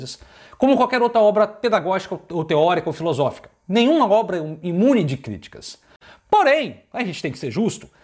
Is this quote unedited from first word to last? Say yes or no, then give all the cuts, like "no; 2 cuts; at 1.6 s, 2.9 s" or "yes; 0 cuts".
yes; 0 cuts